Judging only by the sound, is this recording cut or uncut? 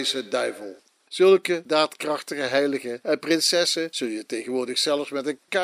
cut